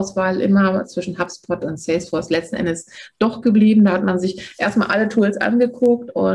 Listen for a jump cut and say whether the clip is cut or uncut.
uncut